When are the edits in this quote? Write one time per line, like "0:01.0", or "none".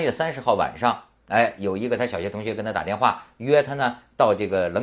none

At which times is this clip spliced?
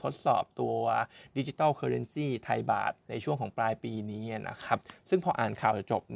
0:03.0

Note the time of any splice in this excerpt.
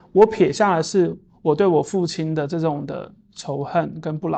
none

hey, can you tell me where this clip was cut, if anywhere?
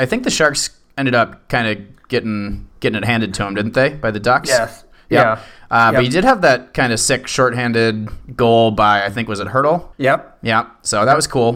none

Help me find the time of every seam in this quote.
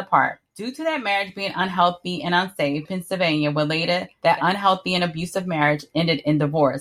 0:02.9

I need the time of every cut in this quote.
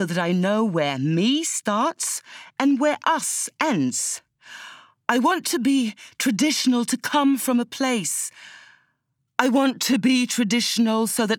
0:05.0

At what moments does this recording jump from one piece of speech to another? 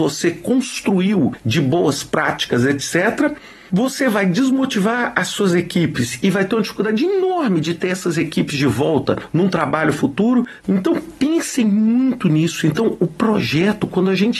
0:10.6

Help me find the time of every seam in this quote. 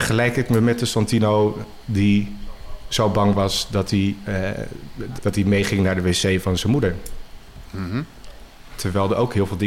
0:05.2
0:08.7

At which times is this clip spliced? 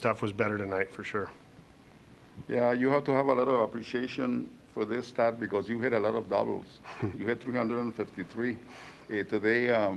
none

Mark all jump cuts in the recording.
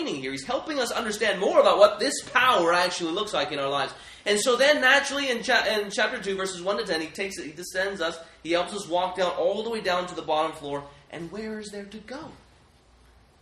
none

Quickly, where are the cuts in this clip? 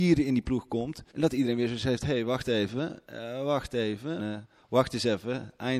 0:01.1
0:04.2

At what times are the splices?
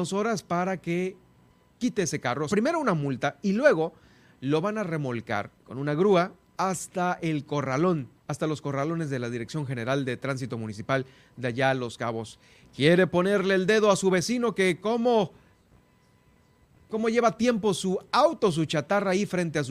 0:02.5
0:05.6
0:08.2

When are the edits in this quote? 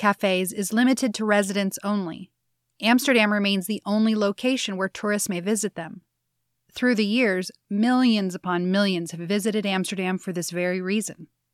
0:06.6

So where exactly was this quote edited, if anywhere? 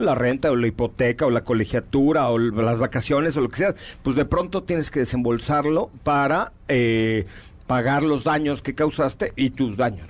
none

